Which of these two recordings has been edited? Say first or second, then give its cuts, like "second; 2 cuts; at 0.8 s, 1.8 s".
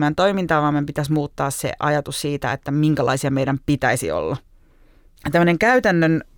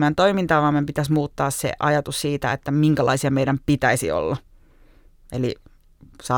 first; 1 cut; at 5.2 s